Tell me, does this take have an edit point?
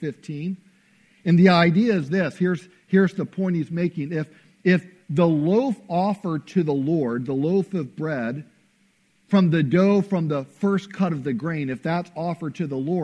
no; 0 cuts

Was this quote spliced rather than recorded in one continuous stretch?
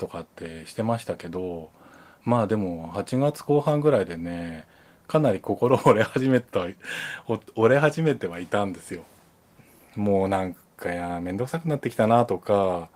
no; 0 cuts

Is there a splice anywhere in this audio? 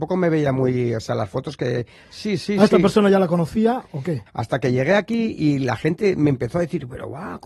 yes; 2 cuts; at 2.0 s, 4.3 s

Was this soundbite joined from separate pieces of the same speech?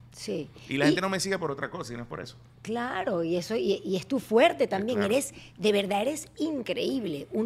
no; 0 cuts

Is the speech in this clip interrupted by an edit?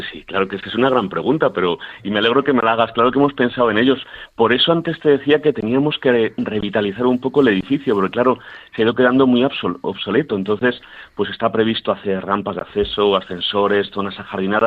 no; 0 cuts

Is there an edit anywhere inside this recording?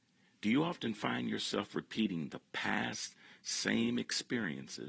no; 0 cuts

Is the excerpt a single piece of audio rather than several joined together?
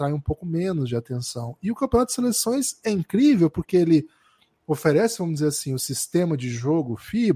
yes; 0 cuts

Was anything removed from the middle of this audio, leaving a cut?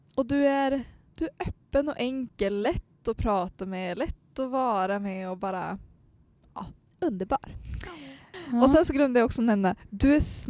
no; 0 cuts

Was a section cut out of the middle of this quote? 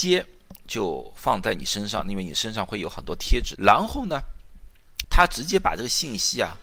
yes; 2 cuts; at 3.6 s, 5.0 s

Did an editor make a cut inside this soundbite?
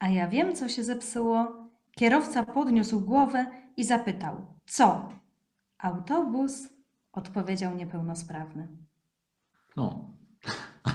no; 0 cuts

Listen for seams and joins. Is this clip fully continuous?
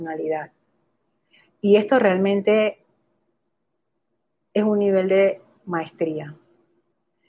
yes; 0 cuts

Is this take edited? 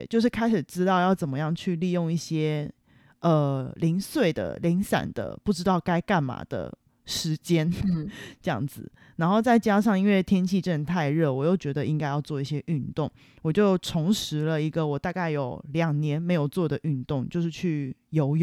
no; 0 cuts

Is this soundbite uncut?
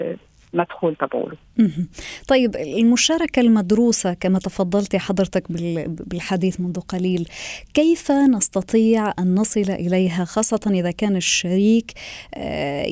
yes; 0 cuts

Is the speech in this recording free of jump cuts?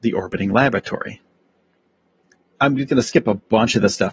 no; 1 cut; at 2.5 s

